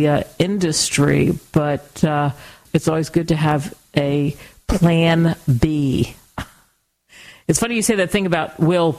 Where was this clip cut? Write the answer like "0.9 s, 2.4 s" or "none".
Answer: 2.6 s